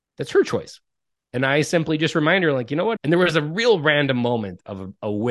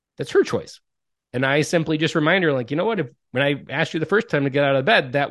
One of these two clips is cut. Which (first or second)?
first